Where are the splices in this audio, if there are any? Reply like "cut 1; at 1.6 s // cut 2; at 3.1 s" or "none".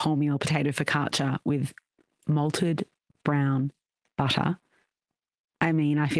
none